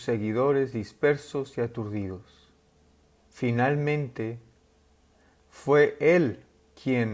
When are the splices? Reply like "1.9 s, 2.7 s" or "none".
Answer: 3.2 s